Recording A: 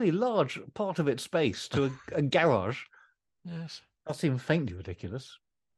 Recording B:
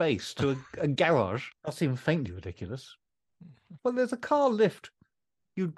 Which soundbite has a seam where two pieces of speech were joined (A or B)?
B